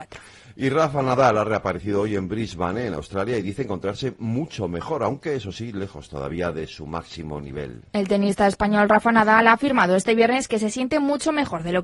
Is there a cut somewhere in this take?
no; 0 cuts

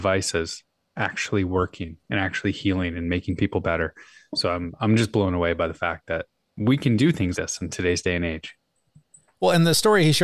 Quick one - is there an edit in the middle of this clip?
yes; 1 cut; at 7.3 s

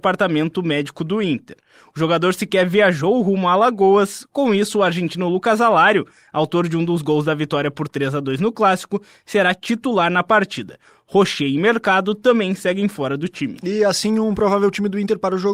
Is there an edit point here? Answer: no; 0 cuts

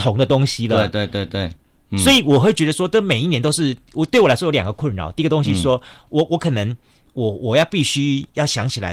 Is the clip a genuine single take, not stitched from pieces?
yes; 0 cuts

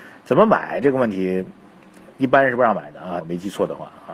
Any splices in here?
yes; 1 cut; at 3.2 s

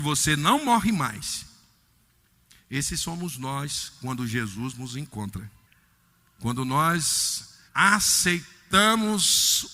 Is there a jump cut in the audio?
yes; 1 cut; at 7.7 s

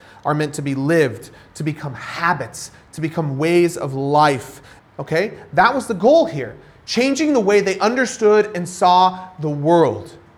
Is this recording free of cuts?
no; 1 cut; at 4.8 s

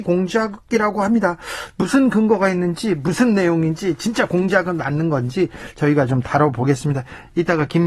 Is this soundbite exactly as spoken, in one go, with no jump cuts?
yes; 0 cuts

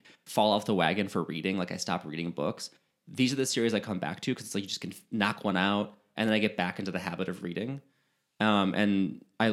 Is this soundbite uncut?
yes; 0 cuts

